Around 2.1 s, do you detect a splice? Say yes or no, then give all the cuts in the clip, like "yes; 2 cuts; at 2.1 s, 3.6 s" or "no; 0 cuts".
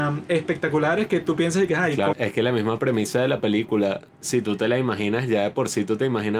yes; 1 cut; at 2.1 s